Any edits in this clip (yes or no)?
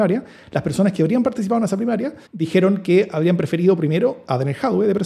yes